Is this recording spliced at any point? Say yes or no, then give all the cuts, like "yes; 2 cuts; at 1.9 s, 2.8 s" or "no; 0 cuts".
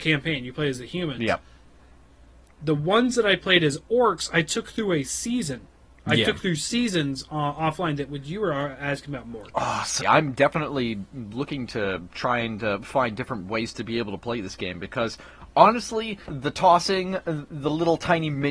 yes; 2 cuts; at 10.0 s, 16.3 s